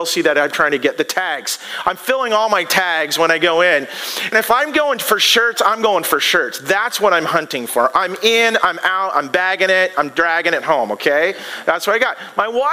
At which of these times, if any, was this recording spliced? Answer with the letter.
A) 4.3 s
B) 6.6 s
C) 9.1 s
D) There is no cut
A